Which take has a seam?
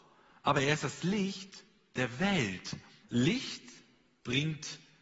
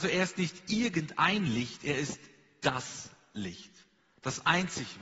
first; 1 cut; at 3.0 s

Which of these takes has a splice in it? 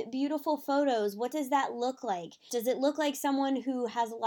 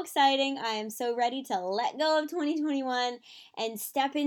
first; 1 cut; at 2.5 s

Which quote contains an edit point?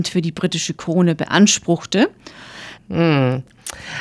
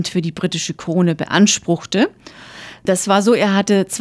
first; 1 cut; at 2.8 s

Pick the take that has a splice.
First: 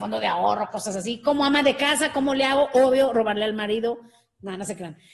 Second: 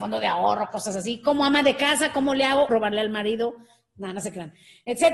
second; 1 cut; at 2.7 s

